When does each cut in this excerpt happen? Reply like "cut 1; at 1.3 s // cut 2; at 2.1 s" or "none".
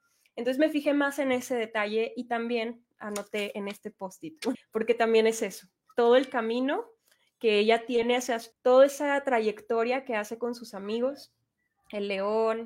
cut 1; at 4.5 s // cut 2; at 8.5 s